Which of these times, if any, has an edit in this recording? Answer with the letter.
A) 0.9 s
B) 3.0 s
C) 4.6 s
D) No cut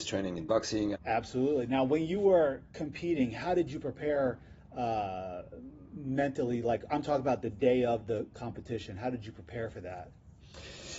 A